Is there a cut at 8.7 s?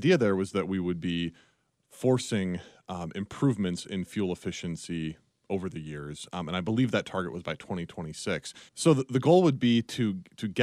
yes; 1 cut; at 8.7 s

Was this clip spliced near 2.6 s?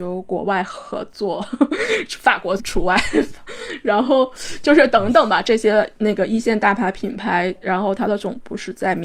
yes; 1 cut; at 2.6 s

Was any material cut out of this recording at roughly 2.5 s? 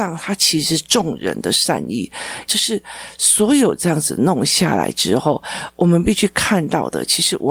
yes; 1 cut; at 2.5 s

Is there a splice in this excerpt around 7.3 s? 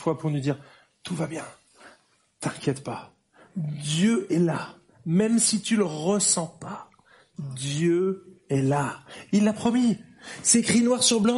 no; 0 cuts

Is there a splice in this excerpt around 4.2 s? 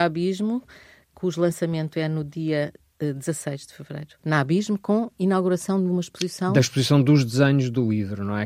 yes; 1 cut; at 4.2 s

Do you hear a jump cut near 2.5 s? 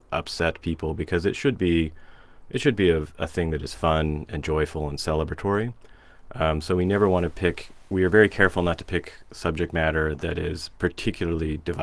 no; 0 cuts

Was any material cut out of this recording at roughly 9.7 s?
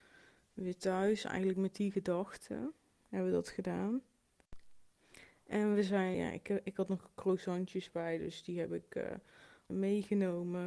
yes; 2 cuts; at 6.1 s, 9.7 s

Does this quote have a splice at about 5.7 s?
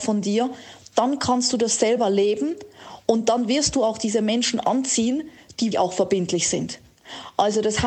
yes; 1 cut; at 5.7 s

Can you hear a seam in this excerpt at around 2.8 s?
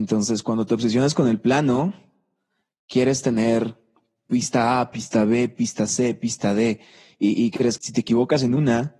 no; 1 cut; at 7.8 s

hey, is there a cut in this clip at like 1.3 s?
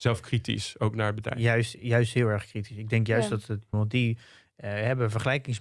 no; 1 cut; at 3.7 s

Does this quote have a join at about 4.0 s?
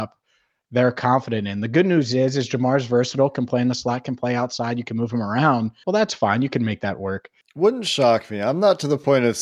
no; 2 cuts; at 5.8 s, 7.4 s

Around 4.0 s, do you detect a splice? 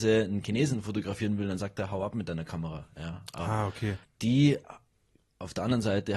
yes; 1 cut; at 4.0 s

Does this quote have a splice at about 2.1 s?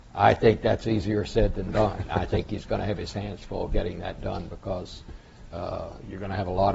no; 0 cuts

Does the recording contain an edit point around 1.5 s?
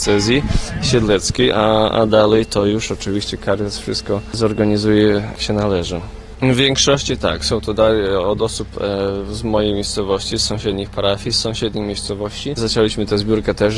no; 3 cuts; at 6.4 s, 10.3 s, 12.6 s

